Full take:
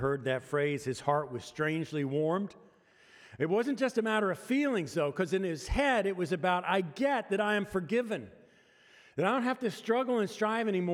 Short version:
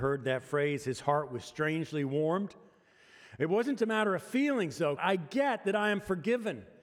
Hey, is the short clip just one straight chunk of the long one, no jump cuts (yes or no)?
no